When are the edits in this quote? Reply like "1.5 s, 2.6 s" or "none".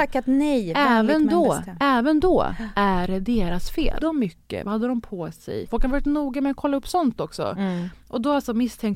4.0 s, 5.7 s

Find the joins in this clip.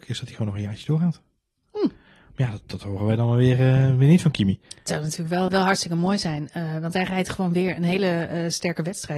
5.5 s

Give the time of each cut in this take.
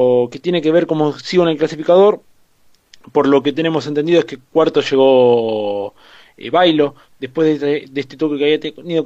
none

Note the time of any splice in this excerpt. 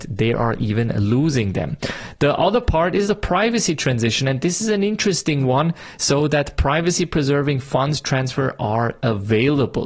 none

